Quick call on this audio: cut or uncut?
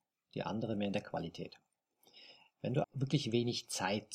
cut